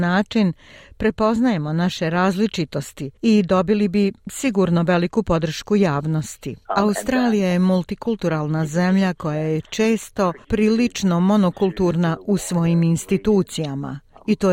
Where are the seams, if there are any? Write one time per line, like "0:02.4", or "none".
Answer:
0:03.2
0:06.7

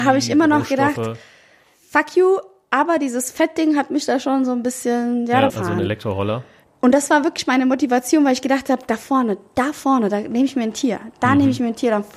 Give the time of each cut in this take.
0:05.5

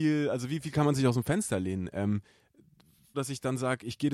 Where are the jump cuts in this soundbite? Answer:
0:03.1

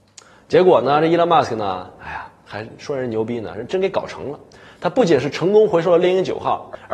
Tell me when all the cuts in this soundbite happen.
none

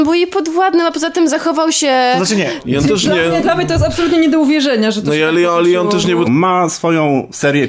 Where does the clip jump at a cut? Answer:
0:06.2

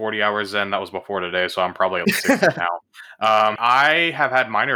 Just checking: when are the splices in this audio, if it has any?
0:02.0
0:03.6

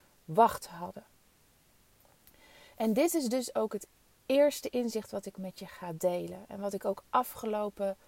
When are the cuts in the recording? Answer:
none

